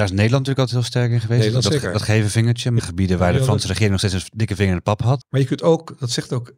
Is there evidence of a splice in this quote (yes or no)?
yes